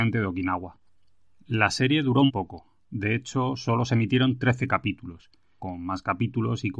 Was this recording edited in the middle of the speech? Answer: yes; 2 cuts; at 2.3 s, 5.6 s

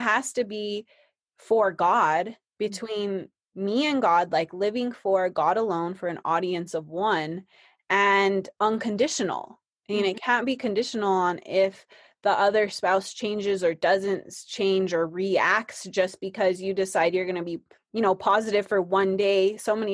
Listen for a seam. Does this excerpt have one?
no; 0 cuts

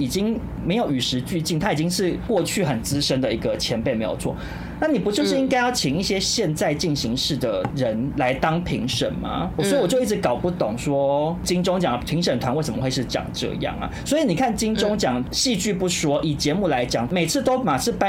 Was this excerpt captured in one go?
yes; 0 cuts

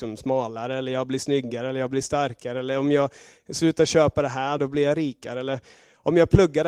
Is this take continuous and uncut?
no; 1 cut; at 4.6 s

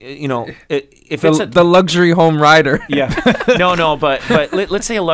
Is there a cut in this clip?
no; 0 cuts

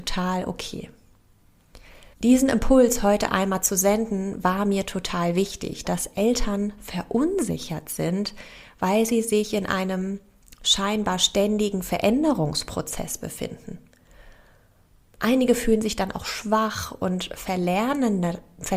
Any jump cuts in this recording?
yes; 2 cuts; at 2.1 s, 5.8 s

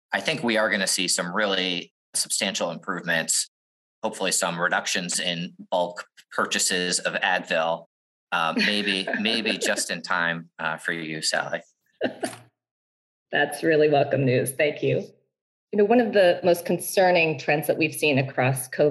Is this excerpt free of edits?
yes; 0 cuts

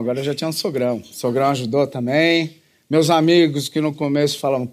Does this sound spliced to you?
no; 0 cuts

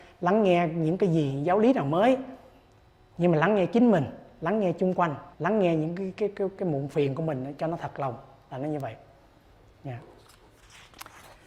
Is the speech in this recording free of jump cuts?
no; 1 cut; at 5.3 s

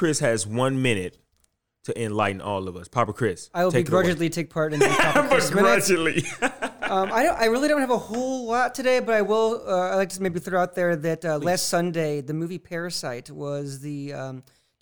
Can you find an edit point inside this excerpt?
no; 0 cuts

